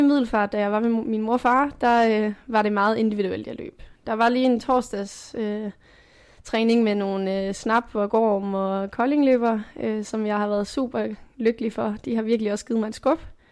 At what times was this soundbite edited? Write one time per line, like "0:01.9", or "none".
none